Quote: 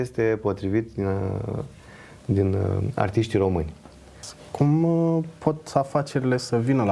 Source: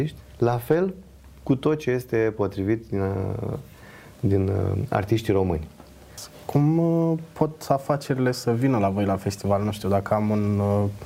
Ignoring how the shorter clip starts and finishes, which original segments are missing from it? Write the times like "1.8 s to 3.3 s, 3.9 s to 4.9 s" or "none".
none